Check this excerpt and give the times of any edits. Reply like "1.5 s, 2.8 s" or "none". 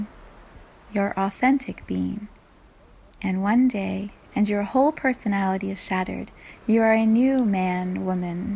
4.3 s